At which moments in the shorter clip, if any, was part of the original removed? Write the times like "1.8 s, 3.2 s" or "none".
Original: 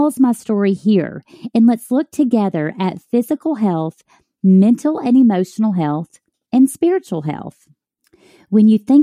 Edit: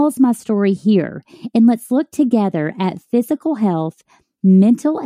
none